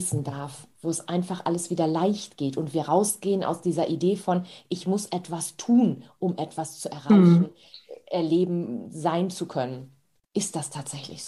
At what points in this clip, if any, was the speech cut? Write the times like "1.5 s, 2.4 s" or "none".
10.2 s